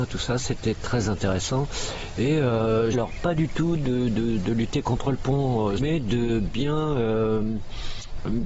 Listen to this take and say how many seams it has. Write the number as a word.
three